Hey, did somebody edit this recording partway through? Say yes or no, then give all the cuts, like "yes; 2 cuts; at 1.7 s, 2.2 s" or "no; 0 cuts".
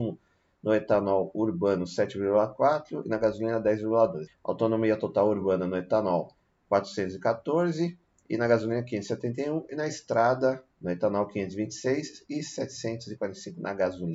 yes; 2 cuts; at 4.3 s, 10.7 s